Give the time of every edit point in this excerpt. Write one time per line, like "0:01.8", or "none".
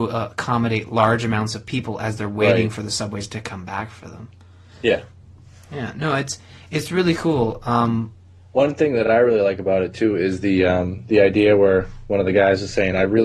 none